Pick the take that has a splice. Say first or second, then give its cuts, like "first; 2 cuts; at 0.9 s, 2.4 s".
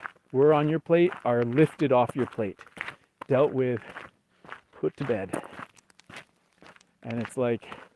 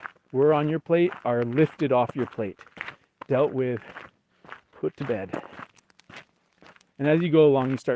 second; 1 cut; at 6.9 s